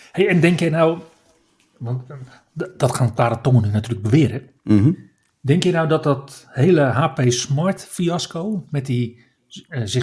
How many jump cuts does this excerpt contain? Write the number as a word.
one